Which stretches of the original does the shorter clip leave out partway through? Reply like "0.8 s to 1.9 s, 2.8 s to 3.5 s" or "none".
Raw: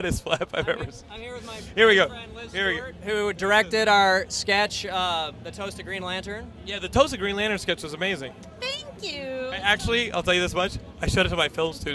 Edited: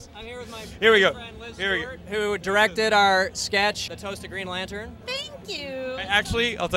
4.8 s to 5.4 s, 6.6 s to 8.6 s